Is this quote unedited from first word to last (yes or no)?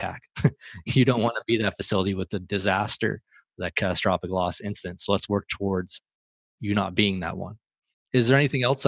yes